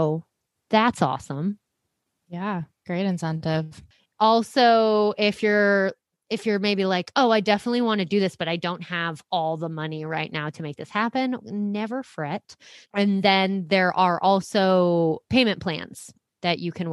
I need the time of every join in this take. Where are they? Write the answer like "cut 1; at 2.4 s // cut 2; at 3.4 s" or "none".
cut 1; at 11.4 s // cut 2; at 12.8 s